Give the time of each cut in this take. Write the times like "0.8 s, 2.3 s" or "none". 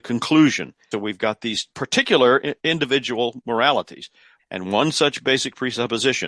0.9 s, 4.4 s